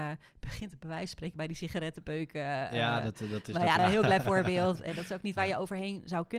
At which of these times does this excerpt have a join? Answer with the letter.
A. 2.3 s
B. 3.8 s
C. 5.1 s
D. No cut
B